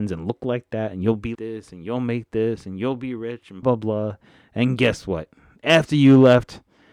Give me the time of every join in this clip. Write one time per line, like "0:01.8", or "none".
0:01.4
0:03.6